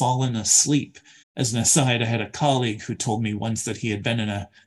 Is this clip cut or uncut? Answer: cut